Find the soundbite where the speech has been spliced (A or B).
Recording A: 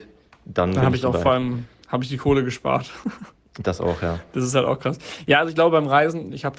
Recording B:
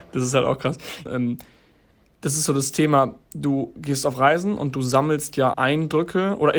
B